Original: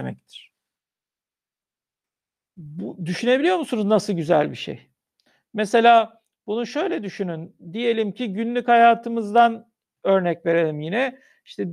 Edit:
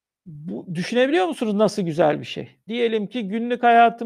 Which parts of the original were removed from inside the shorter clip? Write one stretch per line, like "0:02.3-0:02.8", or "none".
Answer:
0:05.0-0:07.7